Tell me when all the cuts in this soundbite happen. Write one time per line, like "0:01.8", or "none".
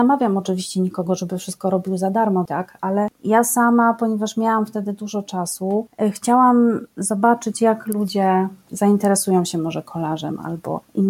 0:02.5